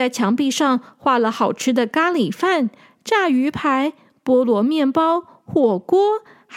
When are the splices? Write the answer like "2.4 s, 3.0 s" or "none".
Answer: none